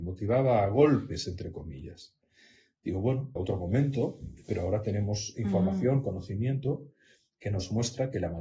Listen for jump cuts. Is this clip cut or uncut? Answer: cut